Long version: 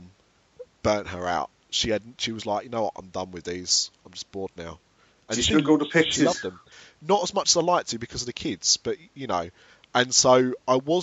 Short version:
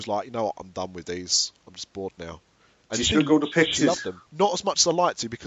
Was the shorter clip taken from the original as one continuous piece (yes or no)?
no